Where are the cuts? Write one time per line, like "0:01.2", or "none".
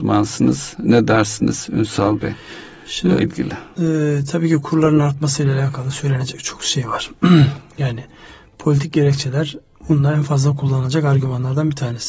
0:03.2